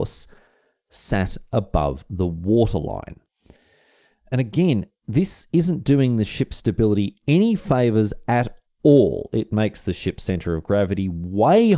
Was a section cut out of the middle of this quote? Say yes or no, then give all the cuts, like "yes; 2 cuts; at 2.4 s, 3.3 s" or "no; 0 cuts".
no; 0 cuts